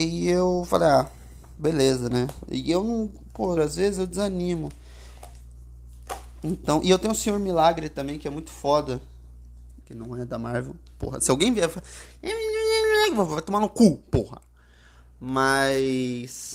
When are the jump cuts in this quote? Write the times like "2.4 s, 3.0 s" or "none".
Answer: 3.6 s, 9.8 s